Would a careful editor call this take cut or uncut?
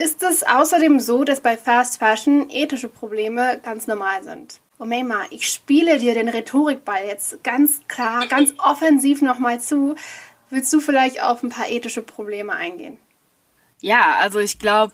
uncut